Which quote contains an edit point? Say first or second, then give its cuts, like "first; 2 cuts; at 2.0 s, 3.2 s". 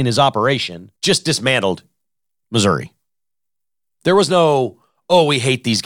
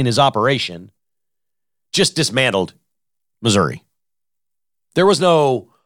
first; 1 cut; at 1.0 s